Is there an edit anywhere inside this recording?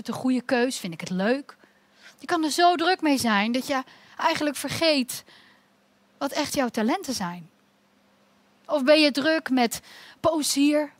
yes; 1 cut; at 2.1 s

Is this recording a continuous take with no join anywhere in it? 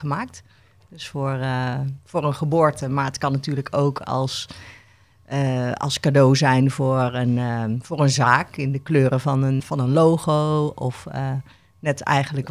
no; 1 cut; at 9.6 s

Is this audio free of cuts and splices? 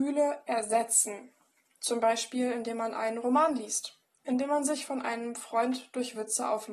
yes; 0 cuts

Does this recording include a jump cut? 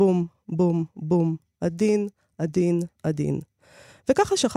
no; 0 cuts

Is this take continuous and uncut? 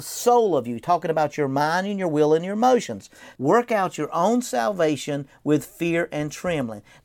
no; 1 cut; at 3.3 s

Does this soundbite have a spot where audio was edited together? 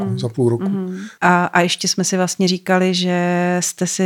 yes; 1 cut; at 1.2 s

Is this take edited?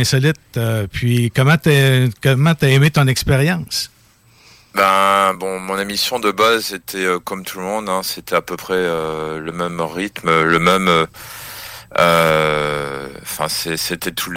no; 0 cuts

